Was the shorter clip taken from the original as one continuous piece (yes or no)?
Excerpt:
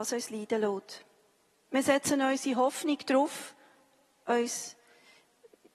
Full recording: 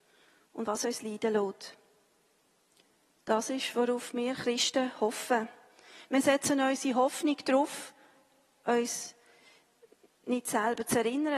no